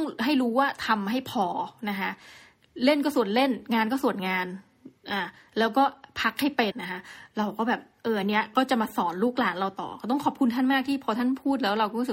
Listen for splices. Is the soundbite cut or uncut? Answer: cut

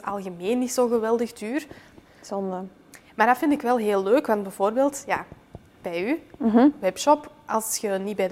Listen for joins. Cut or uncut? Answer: cut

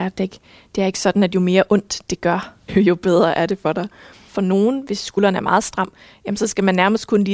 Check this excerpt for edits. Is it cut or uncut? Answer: cut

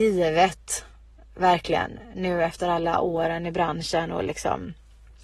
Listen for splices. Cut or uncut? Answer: uncut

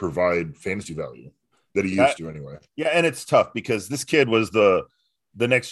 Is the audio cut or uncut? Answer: uncut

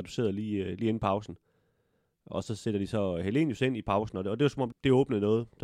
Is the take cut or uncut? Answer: cut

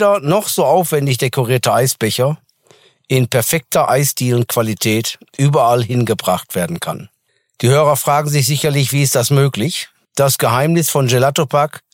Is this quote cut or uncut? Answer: uncut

